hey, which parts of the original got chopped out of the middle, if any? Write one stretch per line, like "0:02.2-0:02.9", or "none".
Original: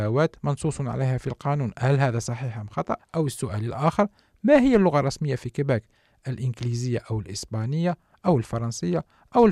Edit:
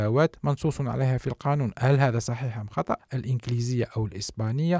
0:03.1-0:06.2